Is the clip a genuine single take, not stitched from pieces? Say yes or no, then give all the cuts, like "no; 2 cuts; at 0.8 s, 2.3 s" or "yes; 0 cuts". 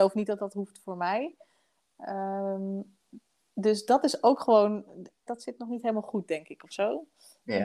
no; 1 cut; at 5.3 s